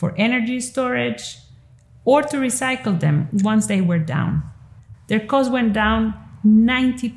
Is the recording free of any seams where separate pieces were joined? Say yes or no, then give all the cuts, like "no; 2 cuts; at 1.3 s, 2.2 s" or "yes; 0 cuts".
no; 1 cut; at 4.9 s